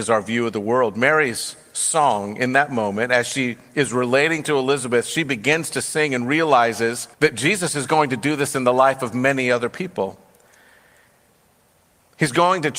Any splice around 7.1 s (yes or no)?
yes